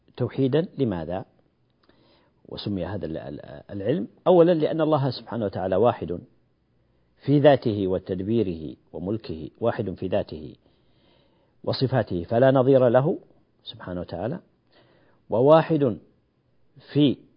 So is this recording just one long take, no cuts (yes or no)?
yes